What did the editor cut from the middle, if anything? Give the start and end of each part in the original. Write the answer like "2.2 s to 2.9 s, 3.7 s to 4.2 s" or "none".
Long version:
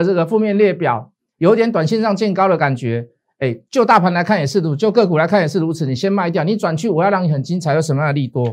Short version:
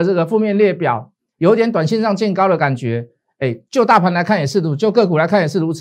none